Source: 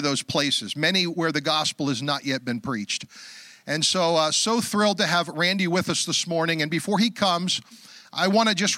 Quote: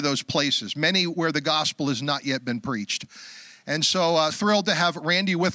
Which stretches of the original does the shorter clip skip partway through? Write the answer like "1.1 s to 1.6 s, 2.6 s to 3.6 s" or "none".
4.3 s to 4.6 s